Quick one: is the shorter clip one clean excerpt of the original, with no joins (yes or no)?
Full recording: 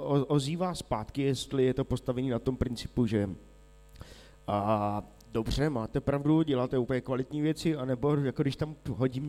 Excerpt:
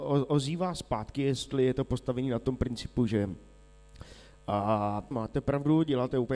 no